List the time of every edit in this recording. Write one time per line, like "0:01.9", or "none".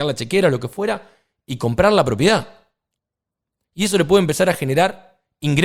none